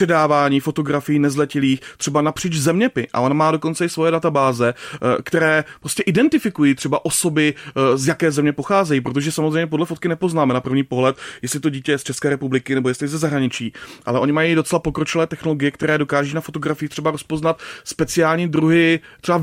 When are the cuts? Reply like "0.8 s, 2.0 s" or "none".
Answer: none